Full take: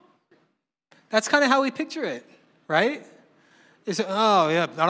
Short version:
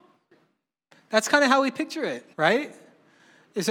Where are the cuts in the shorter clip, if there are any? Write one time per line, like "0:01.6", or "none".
0:02.3